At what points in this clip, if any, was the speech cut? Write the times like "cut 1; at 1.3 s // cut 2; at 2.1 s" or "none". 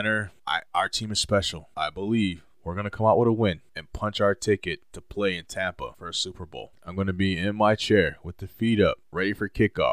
cut 1; at 6.7 s